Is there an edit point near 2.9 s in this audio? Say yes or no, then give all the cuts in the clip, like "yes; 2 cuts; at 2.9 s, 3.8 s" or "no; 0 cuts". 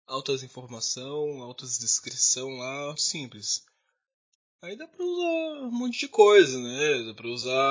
yes; 1 cut; at 2.9 s